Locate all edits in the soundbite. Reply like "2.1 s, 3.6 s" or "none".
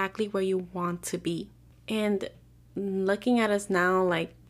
1.7 s